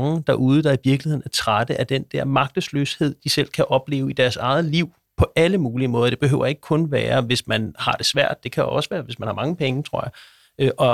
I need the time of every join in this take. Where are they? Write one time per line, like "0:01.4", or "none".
none